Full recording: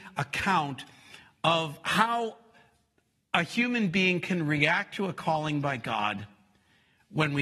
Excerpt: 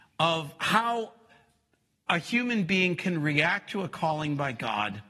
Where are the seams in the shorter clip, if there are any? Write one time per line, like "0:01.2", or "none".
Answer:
none